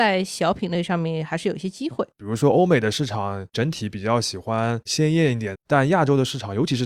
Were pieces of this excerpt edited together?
yes; 2 cuts; at 2.1 s, 5.5 s

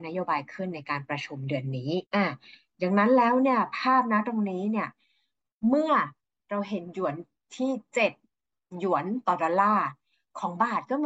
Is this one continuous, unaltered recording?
no; 1 cut; at 2.1 s

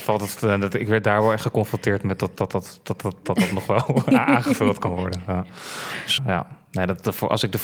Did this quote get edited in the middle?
yes; 1 cut; at 6.2 s

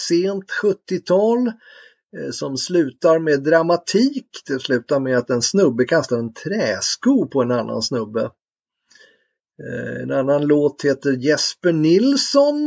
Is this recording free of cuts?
yes; 0 cuts

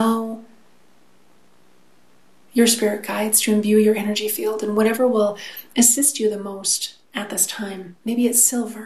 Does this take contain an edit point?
yes; 1 cut; at 7.0 s

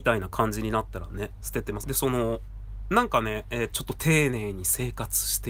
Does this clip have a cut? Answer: yes; 2 cuts; at 1.8 s, 3.7 s

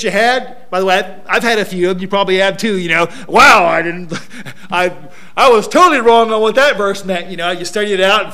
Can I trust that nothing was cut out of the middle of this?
yes; 0 cuts

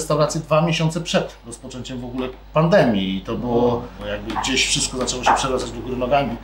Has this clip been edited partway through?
yes; 2 cuts; at 2.4 s, 4.0 s

